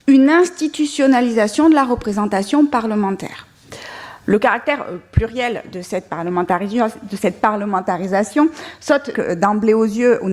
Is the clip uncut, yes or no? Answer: no